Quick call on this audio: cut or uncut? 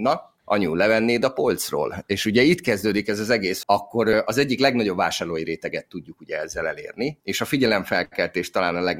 cut